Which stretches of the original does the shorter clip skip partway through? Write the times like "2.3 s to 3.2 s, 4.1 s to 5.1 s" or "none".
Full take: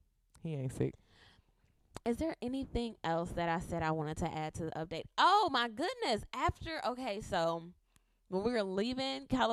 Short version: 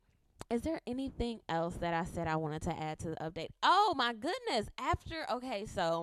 none